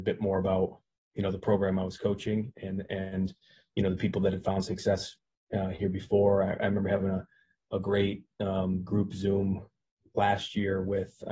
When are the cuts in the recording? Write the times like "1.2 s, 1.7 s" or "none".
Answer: none